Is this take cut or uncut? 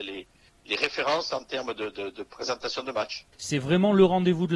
cut